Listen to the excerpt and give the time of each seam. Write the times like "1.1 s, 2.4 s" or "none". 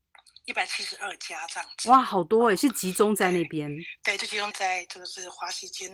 4.5 s